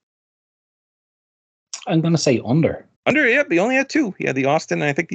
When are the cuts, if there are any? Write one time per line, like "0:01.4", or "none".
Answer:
0:03.0